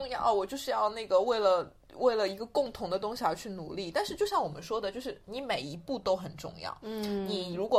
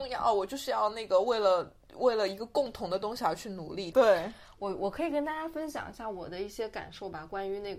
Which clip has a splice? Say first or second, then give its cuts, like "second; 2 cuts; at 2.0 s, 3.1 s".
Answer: second; 1 cut; at 3.9 s